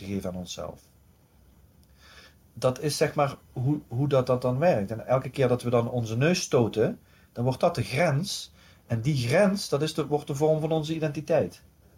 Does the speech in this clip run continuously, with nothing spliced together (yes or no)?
yes